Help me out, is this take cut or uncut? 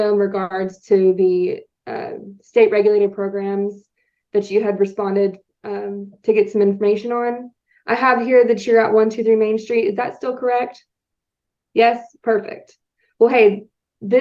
uncut